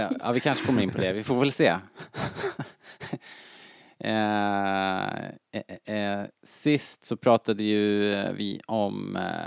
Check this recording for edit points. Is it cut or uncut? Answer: cut